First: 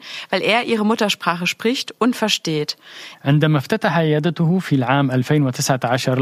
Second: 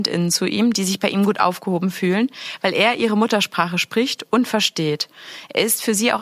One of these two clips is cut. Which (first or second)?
first